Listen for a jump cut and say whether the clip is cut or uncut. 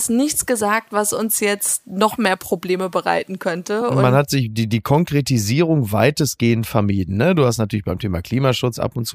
uncut